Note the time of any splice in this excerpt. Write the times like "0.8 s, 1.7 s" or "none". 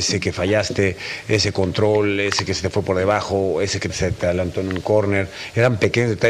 3.9 s